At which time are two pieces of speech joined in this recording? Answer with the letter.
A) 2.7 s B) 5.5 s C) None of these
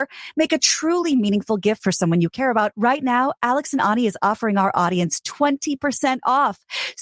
A